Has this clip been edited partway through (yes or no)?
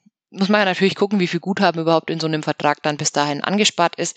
no